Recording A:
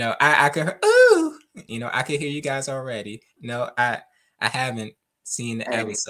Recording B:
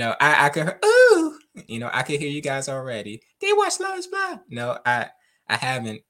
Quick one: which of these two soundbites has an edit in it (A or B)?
A